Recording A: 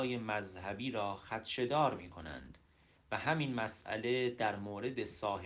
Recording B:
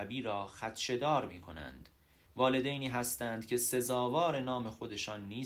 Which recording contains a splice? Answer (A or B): B